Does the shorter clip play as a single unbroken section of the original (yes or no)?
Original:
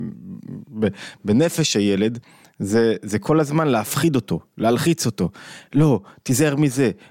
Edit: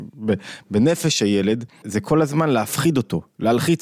no